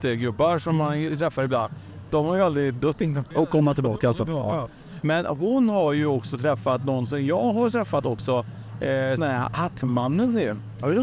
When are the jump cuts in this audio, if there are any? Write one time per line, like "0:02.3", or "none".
0:03.3
0:05.0
0:09.2